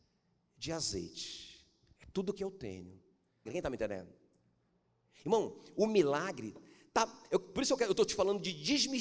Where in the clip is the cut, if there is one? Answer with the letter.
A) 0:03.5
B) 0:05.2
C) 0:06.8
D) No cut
A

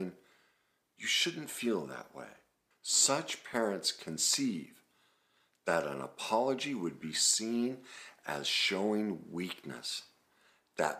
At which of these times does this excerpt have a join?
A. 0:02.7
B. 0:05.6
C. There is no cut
A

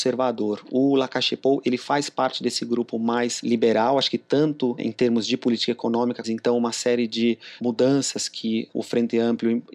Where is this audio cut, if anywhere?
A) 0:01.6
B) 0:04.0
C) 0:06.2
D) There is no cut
C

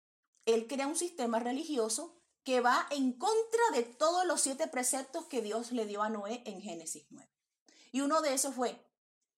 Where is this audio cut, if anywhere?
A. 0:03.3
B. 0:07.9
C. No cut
C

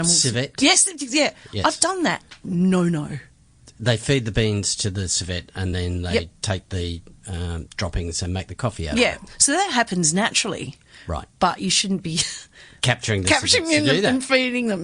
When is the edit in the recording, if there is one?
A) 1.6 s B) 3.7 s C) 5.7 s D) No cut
D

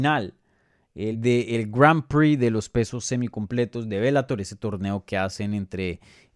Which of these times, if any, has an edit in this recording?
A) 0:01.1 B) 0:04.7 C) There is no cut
A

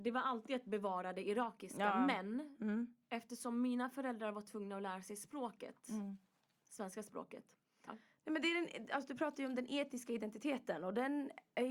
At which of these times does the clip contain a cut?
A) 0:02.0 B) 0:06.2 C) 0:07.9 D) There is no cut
C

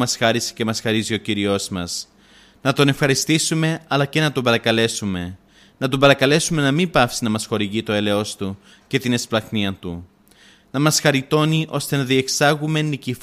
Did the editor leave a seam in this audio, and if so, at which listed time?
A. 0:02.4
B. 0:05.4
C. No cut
C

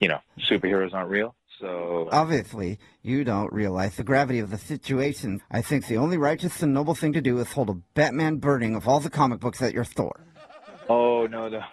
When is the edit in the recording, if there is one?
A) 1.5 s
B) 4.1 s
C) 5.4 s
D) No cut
C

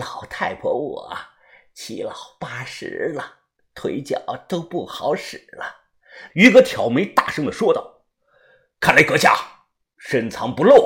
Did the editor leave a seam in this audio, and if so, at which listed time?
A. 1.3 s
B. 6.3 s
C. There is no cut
B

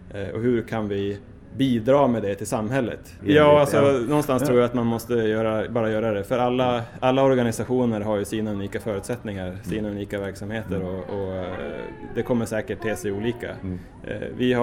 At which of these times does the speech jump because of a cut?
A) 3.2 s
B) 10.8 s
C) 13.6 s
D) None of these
A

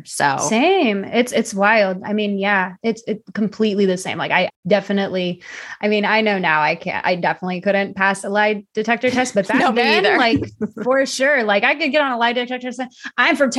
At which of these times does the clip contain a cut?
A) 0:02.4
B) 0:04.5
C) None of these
B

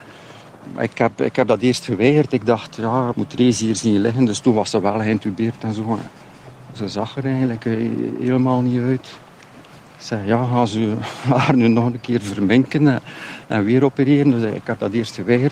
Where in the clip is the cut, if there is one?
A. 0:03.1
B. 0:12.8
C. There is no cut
A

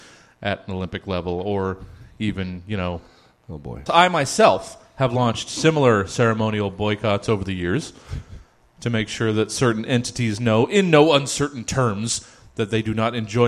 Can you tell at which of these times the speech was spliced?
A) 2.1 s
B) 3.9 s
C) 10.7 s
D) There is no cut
B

